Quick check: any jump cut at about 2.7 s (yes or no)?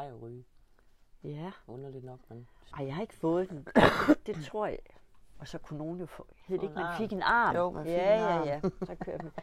yes